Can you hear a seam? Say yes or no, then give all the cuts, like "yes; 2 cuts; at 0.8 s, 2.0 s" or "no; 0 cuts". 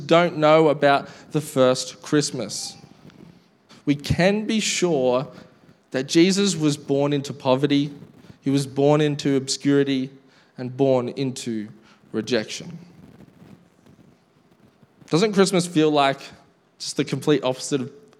yes; 1 cut; at 3.7 s